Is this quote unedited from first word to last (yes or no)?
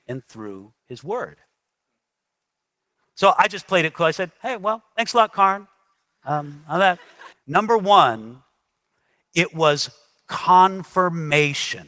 no